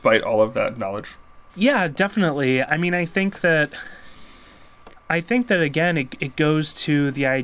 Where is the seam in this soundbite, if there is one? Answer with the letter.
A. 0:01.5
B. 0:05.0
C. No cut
A